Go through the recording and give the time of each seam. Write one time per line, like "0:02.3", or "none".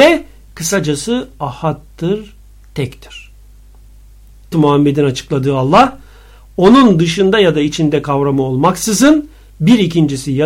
0:04.5